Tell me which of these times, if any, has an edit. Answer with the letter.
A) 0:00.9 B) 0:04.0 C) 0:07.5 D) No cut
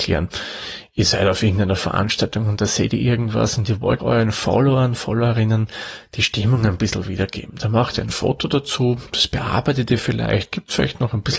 B